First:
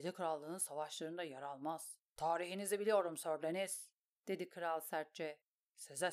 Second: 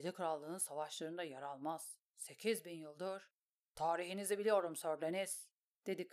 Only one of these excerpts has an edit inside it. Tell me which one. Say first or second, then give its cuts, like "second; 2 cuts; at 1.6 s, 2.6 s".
first; 1 cut; at 2.1 s